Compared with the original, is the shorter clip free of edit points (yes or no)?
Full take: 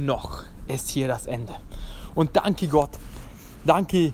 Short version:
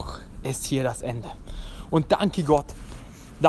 yes